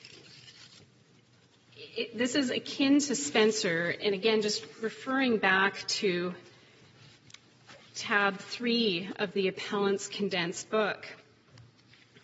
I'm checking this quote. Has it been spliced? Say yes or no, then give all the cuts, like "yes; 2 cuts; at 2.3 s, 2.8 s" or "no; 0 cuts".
yes; 2 cuts; at 1.7 s, 4.0 s